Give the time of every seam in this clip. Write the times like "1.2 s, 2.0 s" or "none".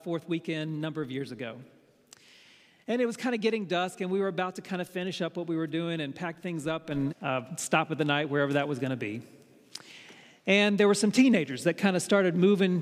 7.1 s